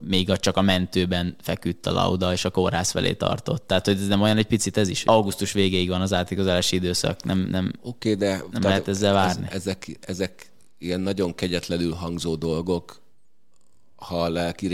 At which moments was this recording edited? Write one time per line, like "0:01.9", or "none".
0:05.0